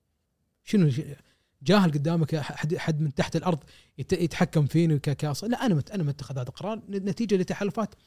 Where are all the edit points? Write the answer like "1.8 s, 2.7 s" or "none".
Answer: none

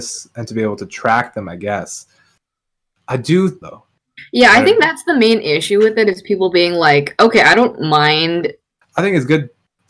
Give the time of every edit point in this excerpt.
3.6 s, 8.8 s

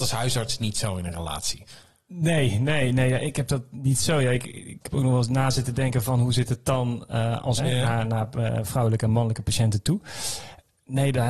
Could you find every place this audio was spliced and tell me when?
7.6 s

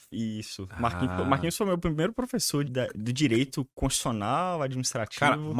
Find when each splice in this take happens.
2.7 s

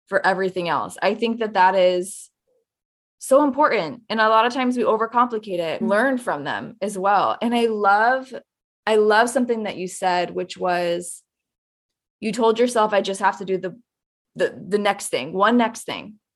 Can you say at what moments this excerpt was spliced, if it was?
5.8 s

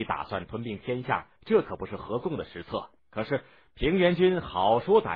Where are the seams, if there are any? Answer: 1.4 s, 3.0 s

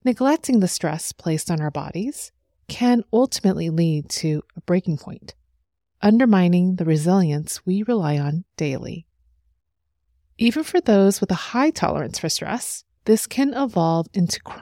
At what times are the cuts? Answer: 13.0 s

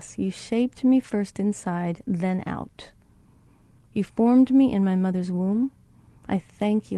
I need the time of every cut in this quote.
none

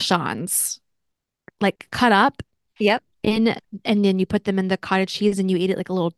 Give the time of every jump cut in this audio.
none

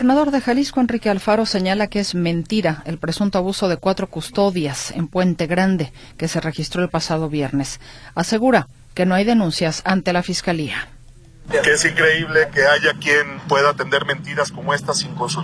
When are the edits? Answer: 13.4 s

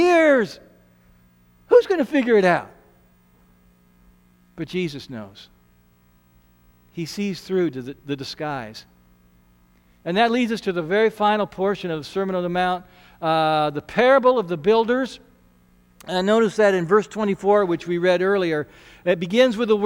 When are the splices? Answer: none

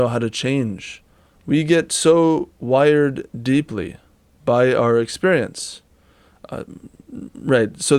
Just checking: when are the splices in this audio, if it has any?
1.3 s

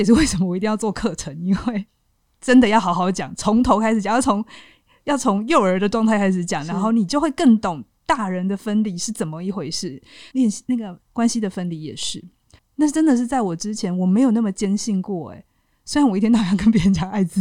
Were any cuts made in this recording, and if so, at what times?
10.3 s, 12.6 s

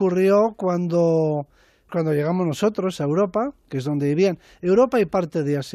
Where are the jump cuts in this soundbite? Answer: 1.9 s, 3.0 s

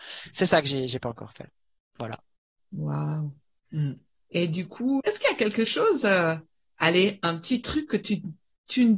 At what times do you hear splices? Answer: 5.0 s

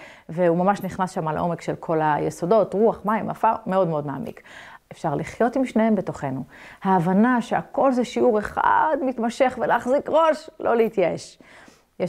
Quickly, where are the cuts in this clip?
4.8 s, 6.8 s

